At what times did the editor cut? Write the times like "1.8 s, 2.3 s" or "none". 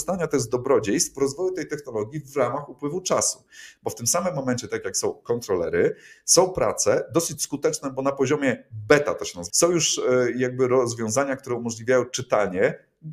9.5 s

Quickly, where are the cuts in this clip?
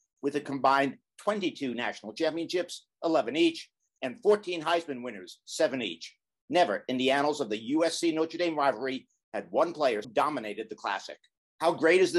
10.0 s

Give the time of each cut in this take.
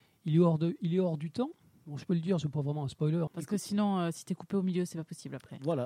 3.3 s

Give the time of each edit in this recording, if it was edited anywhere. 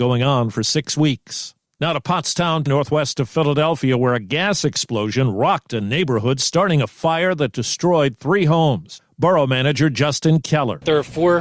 2.7 s

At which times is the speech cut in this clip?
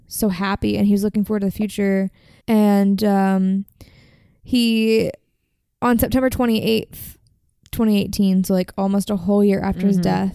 2.4 s

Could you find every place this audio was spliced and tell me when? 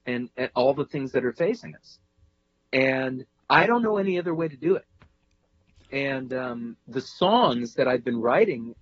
none

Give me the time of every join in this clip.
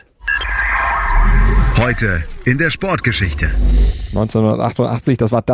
none

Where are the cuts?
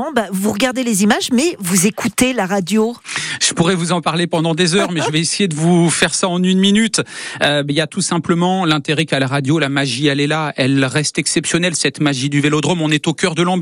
none

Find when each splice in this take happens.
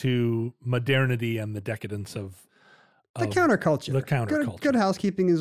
none

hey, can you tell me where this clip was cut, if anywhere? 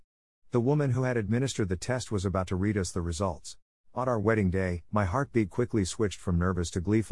3.8 s, 4.9 s

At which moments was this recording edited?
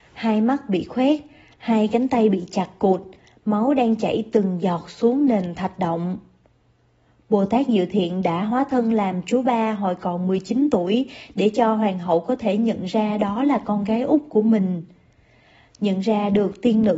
none

